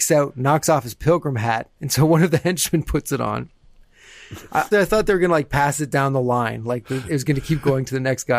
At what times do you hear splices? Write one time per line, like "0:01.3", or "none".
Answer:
0:04.7